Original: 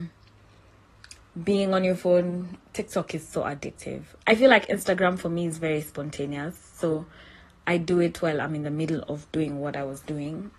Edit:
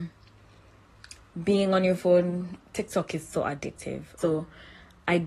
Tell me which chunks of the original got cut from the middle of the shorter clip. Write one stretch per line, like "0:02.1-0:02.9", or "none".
0:04.2-0:06.8